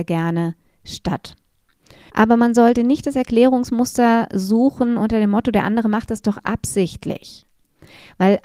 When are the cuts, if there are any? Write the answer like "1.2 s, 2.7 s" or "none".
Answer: 2.1 s